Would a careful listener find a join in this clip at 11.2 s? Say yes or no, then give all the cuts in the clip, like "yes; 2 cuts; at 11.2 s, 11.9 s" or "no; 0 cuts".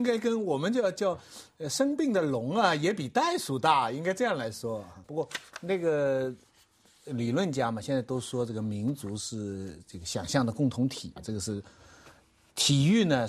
yes; 2 cuts; at 5.0 s, 11.2 s